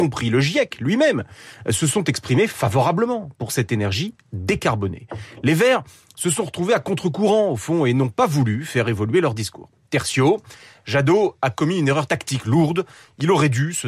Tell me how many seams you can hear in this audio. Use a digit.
0